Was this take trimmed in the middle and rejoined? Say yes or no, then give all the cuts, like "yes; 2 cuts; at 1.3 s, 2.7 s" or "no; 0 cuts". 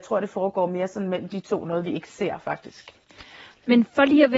no; 0 cuts